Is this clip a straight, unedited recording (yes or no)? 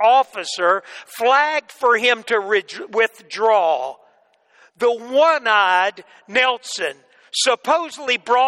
yes